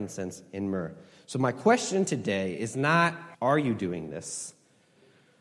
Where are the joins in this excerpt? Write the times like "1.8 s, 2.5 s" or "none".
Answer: 3.3 s